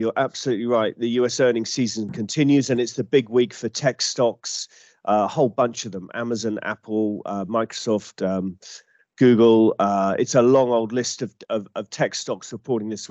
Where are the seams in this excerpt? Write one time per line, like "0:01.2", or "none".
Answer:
none